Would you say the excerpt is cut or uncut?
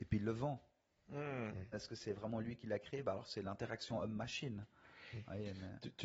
cut